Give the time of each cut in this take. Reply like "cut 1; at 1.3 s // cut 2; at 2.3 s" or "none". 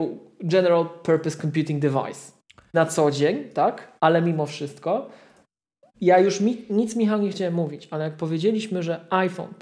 cut 1; at 2.7 s // cut 2; at 4.0 s // cut 3; at 5.9 s